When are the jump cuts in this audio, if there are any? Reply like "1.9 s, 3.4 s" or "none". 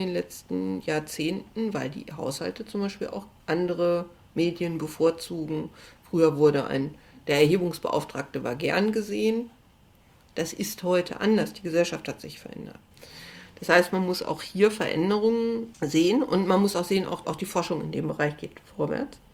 17.2 s